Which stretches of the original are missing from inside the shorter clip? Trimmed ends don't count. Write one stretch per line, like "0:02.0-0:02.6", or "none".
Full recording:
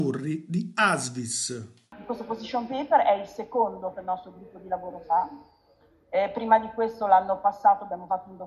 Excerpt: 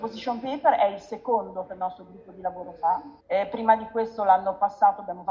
0:05.5-0:06.0